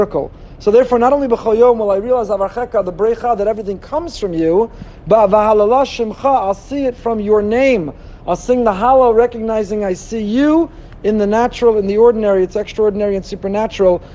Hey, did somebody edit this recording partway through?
no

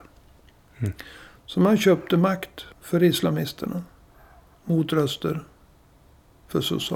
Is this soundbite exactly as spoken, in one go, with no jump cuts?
no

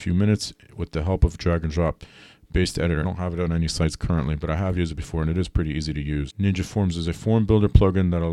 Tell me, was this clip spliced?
yes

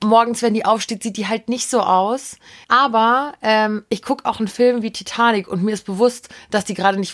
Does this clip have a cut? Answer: yes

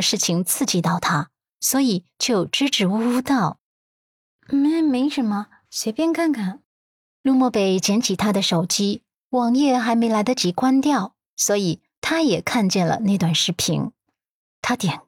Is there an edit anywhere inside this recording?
yes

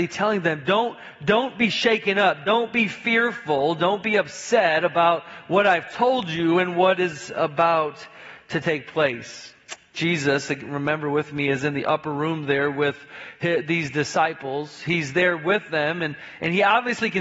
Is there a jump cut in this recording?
no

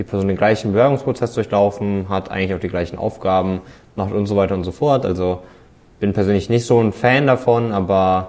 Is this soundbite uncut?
yes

